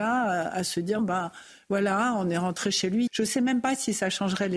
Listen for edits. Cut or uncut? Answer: cut